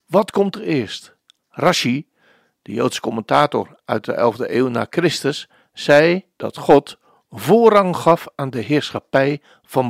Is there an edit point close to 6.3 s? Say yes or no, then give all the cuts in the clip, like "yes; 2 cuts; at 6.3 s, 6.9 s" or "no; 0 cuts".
yes; 2 cuts; at 1.4 s, 6.3 s